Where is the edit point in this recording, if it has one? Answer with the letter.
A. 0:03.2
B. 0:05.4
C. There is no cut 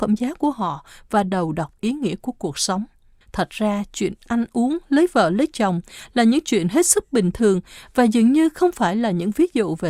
A